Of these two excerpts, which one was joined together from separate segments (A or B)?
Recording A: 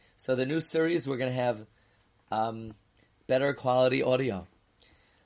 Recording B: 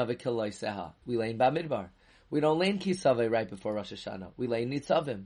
B